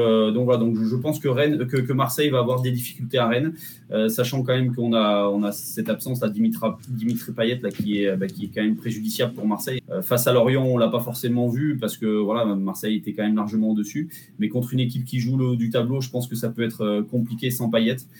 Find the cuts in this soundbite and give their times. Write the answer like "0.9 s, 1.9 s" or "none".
9.8 s